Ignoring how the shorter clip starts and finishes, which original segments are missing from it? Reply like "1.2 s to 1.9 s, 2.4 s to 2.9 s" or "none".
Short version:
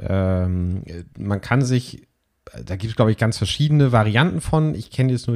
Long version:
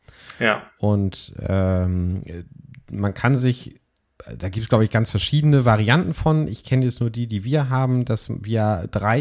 2.5 s to 2.8 s

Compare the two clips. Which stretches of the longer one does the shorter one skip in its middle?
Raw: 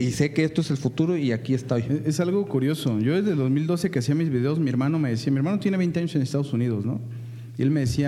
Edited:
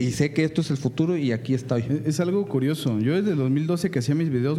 none

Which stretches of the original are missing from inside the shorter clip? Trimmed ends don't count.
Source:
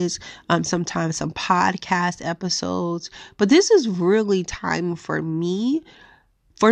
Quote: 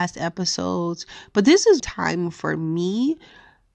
3.8 s to 4.4 s

